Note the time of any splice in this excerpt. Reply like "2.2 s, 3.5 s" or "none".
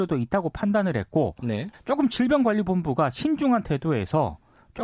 1.7 s